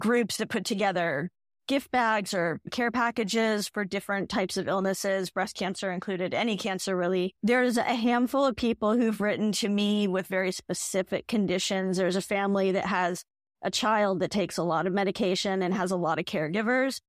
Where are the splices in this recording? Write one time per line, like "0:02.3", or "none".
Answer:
none